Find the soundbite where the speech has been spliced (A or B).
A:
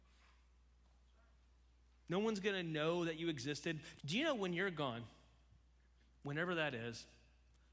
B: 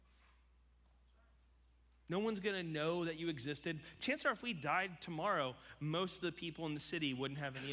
A